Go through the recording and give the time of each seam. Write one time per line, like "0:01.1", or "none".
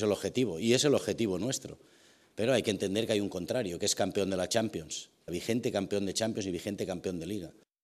0:05.3